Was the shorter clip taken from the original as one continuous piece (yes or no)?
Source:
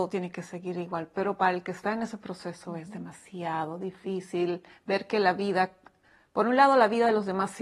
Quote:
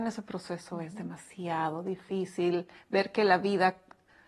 yes